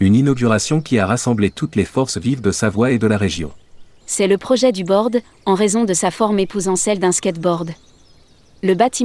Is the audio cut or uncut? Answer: cut